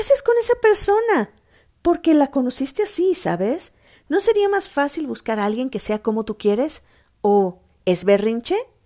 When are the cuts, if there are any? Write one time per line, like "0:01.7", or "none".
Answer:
none